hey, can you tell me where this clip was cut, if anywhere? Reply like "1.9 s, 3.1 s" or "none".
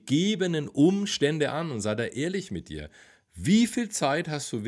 none